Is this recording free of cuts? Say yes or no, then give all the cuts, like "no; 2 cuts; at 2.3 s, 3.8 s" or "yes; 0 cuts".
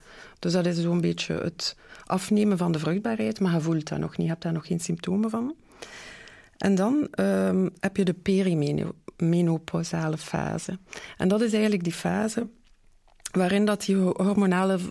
yes; 0 cuts